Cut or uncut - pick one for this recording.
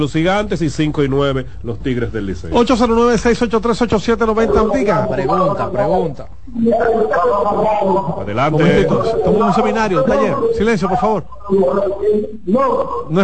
cut